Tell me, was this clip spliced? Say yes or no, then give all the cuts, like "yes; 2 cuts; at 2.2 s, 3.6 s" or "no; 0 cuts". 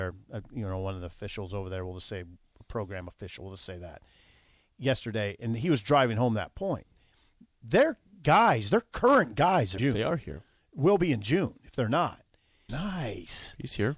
yes; 2 cuts; at 9.8 s, 12.7 s